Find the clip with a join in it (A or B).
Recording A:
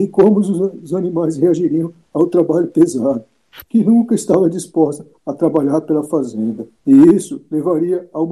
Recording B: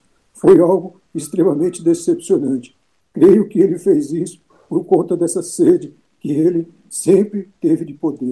A